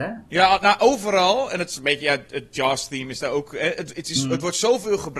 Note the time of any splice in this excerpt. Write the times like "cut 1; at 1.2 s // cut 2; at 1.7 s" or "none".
cut 1; at 2.3 s

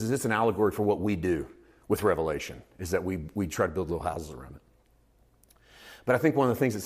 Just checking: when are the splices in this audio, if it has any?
none

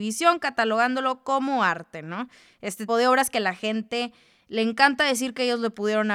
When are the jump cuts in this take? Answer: cut 1; at 2.9 s

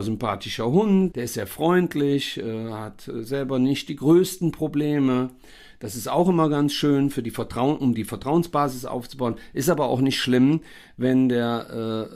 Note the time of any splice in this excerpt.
cut 1; at 1.1 s

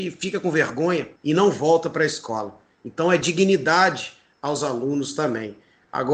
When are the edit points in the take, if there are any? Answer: cut 1; at 1.2 s

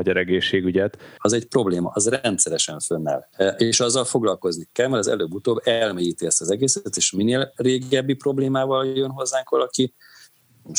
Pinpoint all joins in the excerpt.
cut 1; at 1.2 s

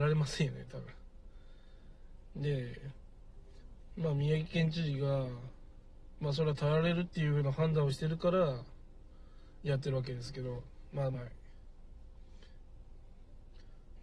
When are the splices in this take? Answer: cut 1; at 11.1 s

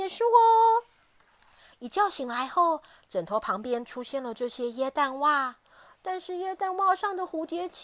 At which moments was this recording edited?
cut 1; at 1.7 s

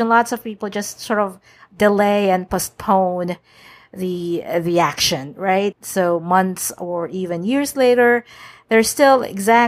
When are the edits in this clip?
cut 1; at 5.7 s

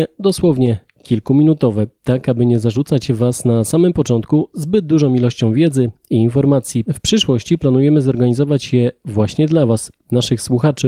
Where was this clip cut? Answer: cut 1; at 6.9 s

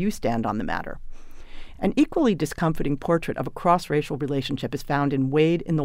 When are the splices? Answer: none

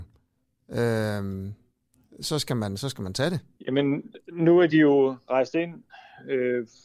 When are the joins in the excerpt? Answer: cut 1; at 3.6 s

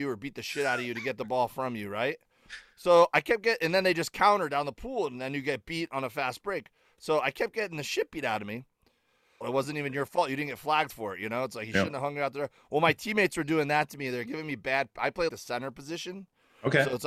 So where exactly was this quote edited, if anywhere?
cut 1; at 9.4 s // cut 2; at 15.3 s

